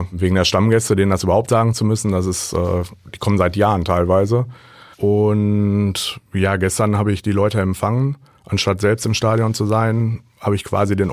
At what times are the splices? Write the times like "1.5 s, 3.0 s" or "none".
4.9 s